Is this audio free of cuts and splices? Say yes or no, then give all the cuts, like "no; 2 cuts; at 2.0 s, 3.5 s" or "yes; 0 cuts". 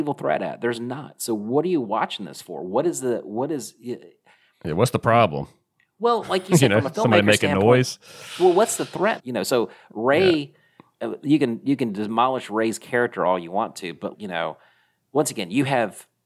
no; 2 cuts; at 9.2 s, 14.1 s